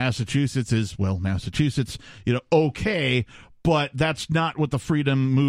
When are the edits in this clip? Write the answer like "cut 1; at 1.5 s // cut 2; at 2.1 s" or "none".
none